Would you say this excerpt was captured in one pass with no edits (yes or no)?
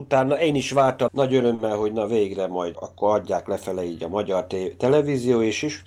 no